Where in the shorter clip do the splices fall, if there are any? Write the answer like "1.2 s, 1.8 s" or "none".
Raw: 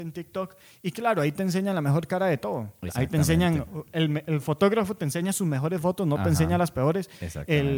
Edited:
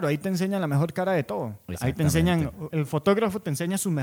2.7 s